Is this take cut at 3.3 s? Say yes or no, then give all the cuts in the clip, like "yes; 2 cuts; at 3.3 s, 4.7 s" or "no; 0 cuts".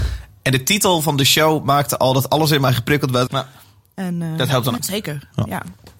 yes; 2 cuts; at 3.3 s, 4.8 s